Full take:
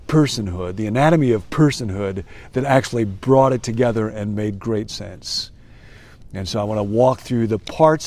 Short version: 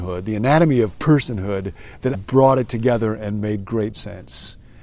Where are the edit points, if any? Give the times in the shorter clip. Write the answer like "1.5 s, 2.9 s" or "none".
2.1 s